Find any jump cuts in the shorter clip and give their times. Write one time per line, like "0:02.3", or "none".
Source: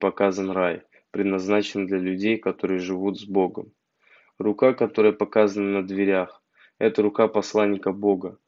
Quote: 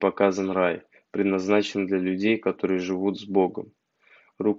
none